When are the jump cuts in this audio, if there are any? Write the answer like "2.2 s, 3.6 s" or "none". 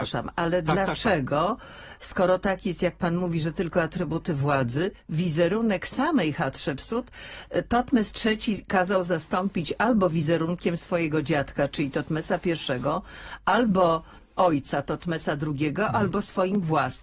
none